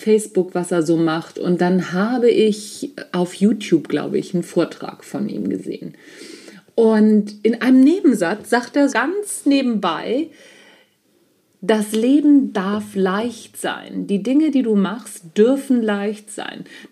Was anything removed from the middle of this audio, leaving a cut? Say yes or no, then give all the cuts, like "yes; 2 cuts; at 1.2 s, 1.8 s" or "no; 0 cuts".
yes; 1 cut; at 8.9 s